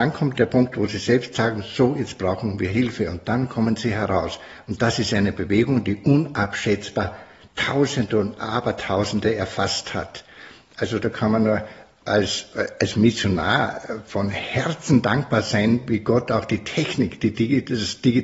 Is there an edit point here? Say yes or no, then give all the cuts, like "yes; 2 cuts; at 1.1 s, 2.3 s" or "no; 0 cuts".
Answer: no; 0 cuts